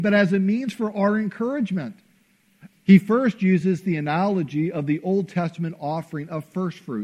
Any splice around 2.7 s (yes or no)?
yes